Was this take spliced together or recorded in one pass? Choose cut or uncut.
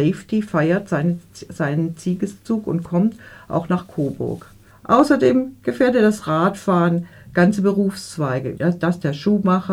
cut